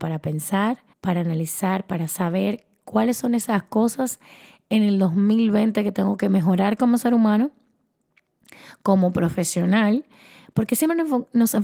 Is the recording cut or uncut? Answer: cut